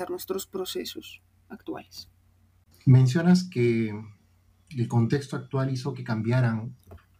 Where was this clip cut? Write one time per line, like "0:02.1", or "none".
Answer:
none